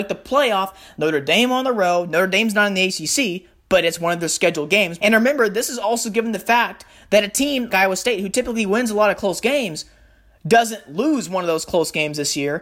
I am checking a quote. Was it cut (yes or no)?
yes